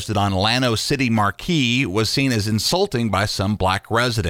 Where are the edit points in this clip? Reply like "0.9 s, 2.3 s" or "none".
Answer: none